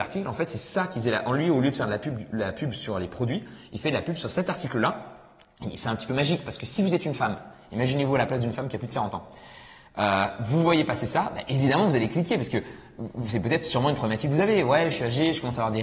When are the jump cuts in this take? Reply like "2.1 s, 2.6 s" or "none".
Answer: none